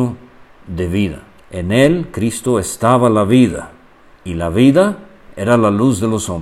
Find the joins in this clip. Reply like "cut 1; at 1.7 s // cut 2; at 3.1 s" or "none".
cut 1; at 1.4 s